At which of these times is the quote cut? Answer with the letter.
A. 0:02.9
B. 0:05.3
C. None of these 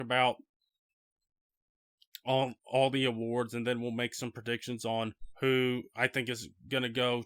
B